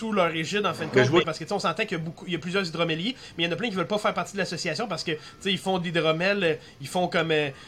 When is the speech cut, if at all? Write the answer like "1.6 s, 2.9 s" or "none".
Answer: 1.2 s